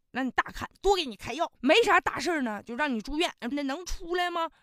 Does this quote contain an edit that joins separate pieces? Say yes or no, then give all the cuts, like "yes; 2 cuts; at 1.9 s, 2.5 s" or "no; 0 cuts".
yes; 2 cuts; at 1.6 s, 3.5 s